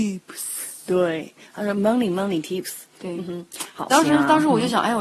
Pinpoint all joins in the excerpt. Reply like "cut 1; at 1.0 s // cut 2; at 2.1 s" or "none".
cut 1; at 3.9 s